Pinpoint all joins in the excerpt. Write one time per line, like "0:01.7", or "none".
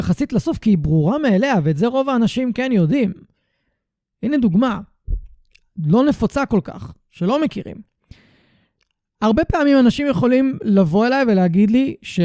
none